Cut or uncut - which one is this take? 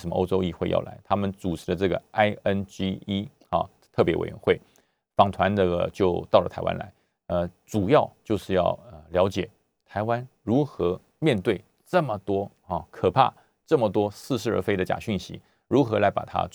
uncut